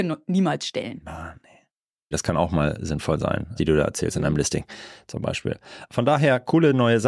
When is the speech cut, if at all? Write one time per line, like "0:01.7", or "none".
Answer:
0:02.1
0:03.6